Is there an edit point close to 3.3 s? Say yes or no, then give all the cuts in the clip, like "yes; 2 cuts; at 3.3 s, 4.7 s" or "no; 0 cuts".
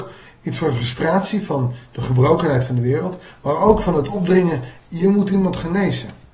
no; 0 cuts